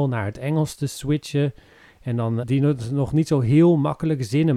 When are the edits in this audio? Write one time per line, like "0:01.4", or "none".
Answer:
0:02.4